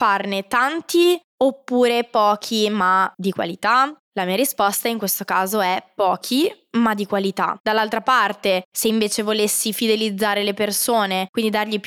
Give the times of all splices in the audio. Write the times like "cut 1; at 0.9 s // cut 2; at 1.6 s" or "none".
cut 1; at 3.1 s // cut 2; at 7.6 s